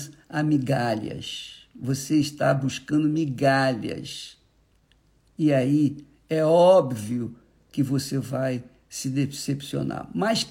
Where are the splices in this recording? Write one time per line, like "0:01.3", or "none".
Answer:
none